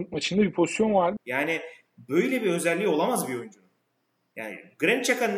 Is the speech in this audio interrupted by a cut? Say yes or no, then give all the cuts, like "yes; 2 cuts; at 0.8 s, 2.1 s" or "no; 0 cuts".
yes; 1 cut; at 1.2 s